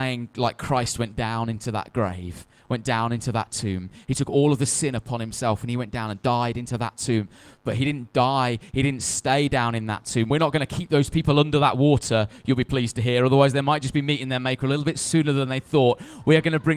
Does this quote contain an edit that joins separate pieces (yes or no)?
no